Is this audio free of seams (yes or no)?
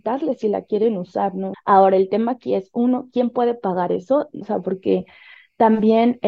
no